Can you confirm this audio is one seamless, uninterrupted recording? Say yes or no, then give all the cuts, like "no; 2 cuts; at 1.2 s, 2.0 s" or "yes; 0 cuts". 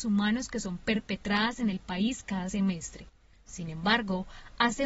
yes; 0 cuts